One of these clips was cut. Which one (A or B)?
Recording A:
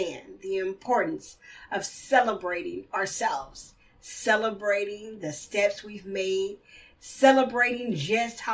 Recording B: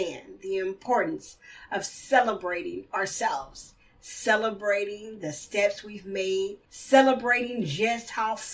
B